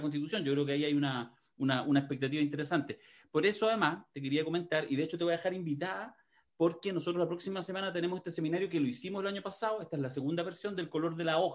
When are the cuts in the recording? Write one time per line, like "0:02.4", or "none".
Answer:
none